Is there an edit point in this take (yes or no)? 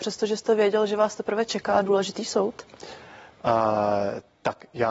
no